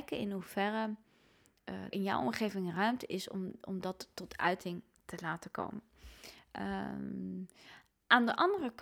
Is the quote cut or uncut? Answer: cut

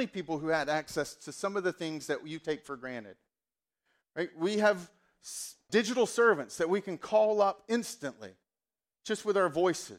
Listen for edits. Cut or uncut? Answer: cut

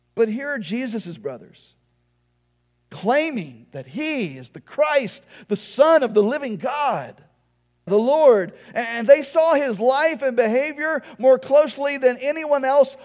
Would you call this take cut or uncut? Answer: cut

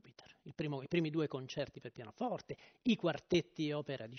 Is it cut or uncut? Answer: uncut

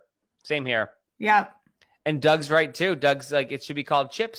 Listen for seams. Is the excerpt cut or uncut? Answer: uncut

